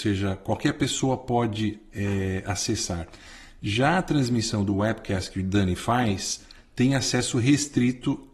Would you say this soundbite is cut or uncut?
uncut